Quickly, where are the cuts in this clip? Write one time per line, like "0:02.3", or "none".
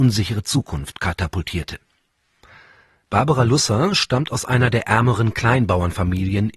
none